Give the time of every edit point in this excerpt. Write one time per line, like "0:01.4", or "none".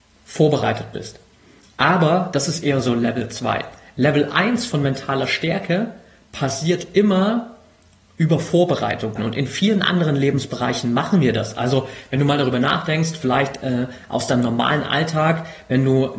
0:09.2